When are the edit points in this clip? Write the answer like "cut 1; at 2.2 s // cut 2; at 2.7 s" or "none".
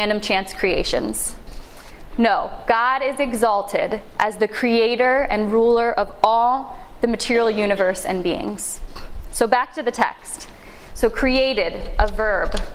cut 1; at 10.9 s

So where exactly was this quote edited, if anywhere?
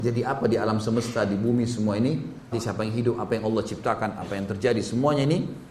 cut 1; at 2.5 s

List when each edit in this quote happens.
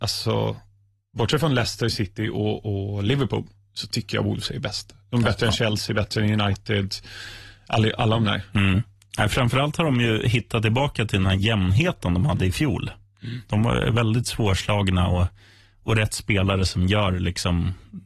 none

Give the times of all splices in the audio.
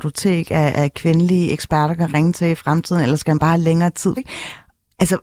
cut 1; at 4.2 s

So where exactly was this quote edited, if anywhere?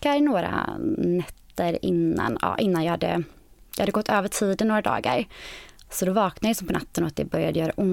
none

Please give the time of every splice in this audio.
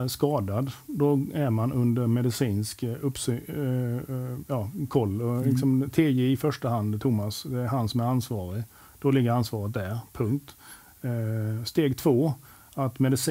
none

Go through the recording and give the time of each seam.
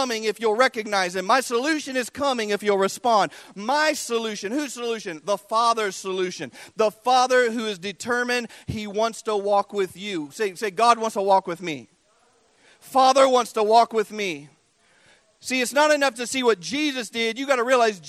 cut 1; at 16.1 s

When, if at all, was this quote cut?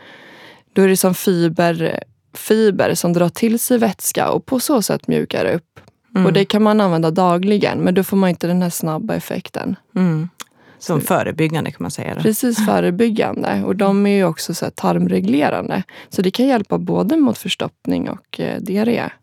none

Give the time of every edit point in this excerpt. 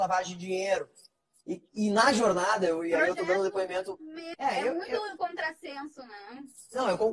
cut 1; at 1.4 s // cut 2; at 4.3 s

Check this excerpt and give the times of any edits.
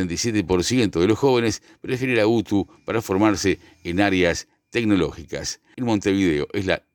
cut 1; at 5.7 s

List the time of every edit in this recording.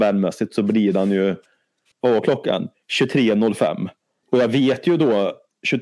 cut 1; at 1.9 s // cut 2; at 4.2 s

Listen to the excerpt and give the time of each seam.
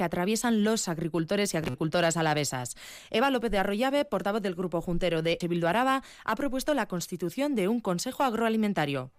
cut 1; at 5.4 s

